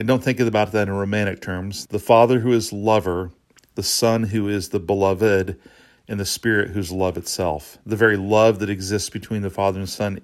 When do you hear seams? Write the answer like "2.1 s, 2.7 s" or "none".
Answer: 1.9 s